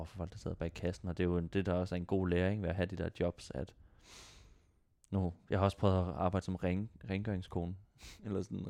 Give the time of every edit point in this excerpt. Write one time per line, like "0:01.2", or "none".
none

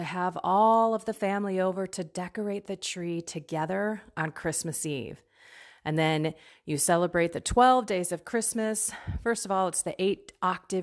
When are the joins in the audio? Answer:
none

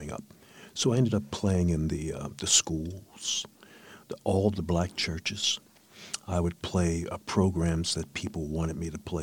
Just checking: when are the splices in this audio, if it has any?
0:04.0

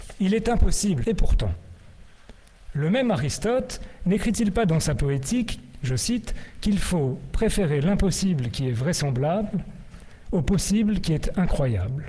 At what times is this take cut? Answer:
0:01.0

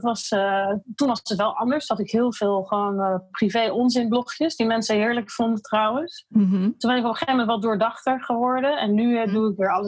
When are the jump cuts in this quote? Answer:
none

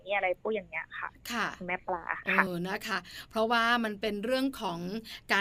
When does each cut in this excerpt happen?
0:02.5

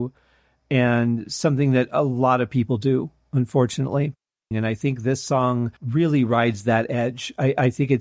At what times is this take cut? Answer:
0:04.5
0:05.8

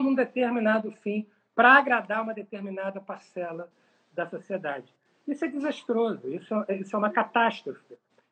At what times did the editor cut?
none

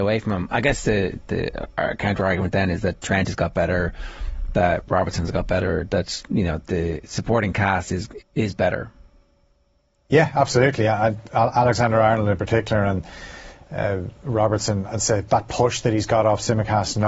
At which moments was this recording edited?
0:08.2
0:15.3

